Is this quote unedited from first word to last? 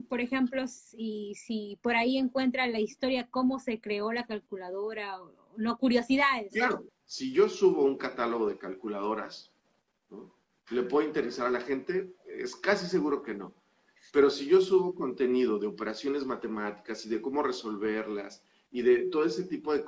no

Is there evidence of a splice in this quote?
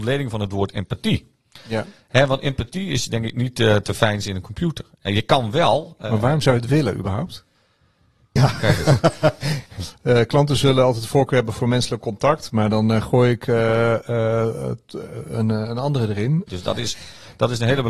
yes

